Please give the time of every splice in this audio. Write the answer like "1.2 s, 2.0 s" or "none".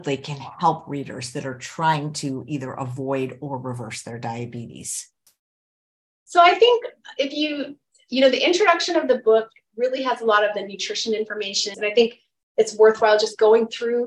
11.7 s